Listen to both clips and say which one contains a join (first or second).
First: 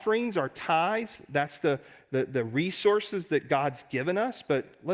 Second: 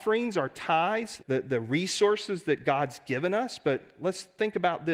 second